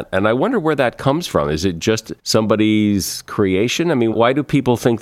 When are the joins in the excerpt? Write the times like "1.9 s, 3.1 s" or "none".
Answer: 2.2 s, 4.1 s